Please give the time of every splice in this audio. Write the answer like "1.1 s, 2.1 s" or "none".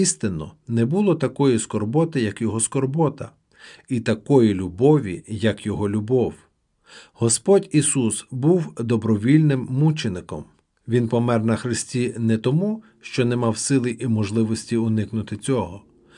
none